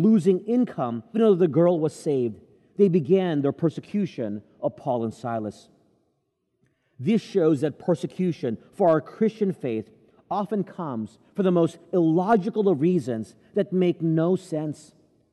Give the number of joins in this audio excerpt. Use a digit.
1